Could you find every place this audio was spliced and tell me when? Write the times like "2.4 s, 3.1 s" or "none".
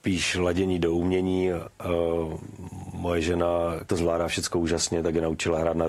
3.9 s